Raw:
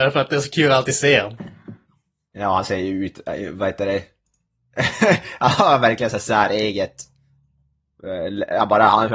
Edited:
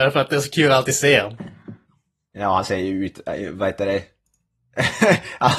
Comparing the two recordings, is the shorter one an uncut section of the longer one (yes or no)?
yes